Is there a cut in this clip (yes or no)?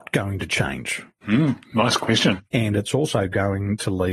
yes